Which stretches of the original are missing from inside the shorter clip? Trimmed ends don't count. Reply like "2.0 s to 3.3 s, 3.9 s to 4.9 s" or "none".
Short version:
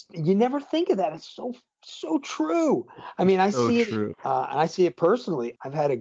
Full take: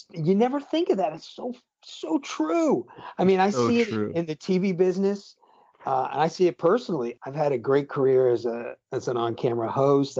4.1 s to 5.7 s